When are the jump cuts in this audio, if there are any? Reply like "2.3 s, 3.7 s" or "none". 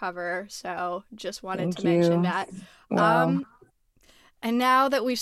none